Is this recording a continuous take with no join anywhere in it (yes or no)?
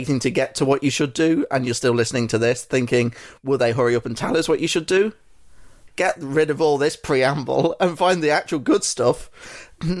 no